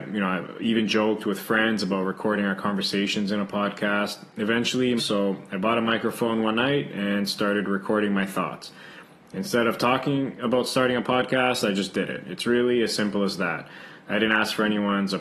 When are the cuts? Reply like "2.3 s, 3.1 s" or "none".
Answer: 5.0 s

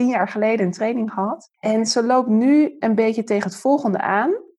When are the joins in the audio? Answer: 1.5 s

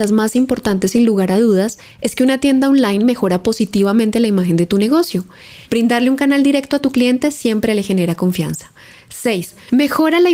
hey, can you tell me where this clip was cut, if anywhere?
5.6 s

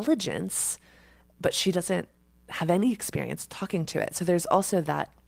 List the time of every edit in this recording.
none

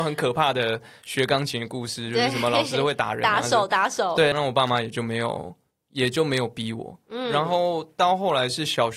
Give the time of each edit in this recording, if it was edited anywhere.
4.3 s

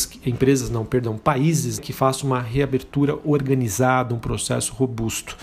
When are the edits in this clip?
1.8 s

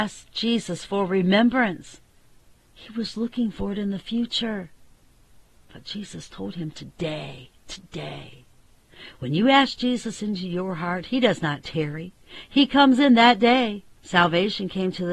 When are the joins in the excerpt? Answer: 14.0 s

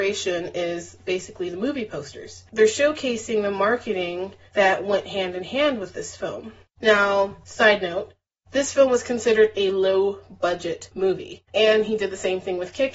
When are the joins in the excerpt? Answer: 11.5 s

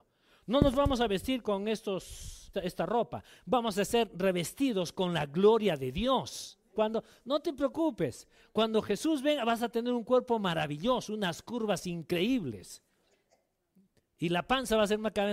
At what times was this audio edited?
2.5 s, 6.7 s

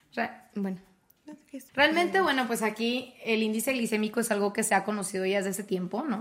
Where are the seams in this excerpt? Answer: 1.7 s

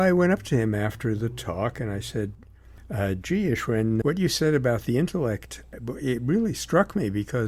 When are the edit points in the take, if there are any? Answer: 4.0 s

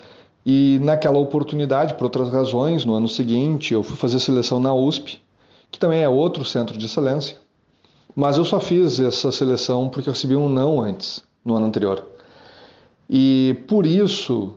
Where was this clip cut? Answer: none

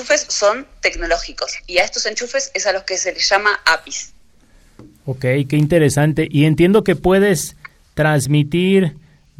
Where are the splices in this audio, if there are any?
none

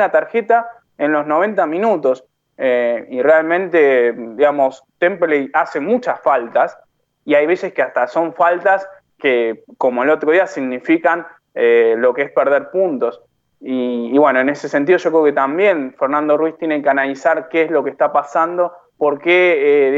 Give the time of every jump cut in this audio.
none

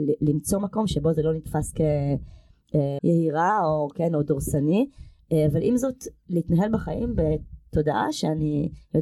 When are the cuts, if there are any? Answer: 3.0 s

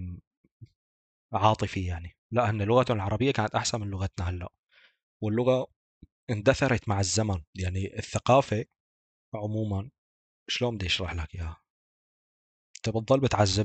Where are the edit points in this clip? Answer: 2.2 s

